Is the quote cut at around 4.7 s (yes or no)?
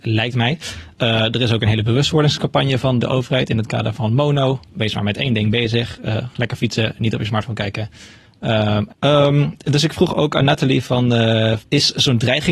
no